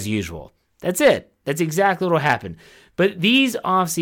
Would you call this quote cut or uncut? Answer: uncut